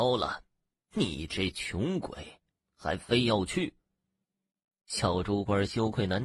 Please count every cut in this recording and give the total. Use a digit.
1